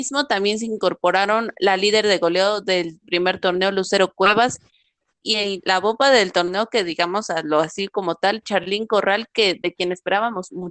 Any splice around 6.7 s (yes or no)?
no